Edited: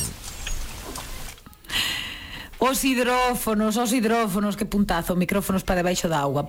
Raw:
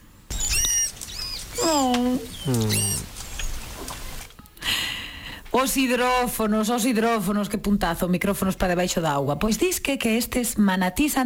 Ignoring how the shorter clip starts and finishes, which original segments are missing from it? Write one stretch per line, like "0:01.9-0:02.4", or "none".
none